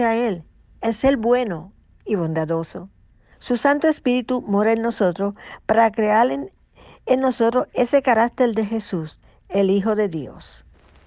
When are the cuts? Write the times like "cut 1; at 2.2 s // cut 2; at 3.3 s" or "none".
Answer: cut 1; at 3.3 s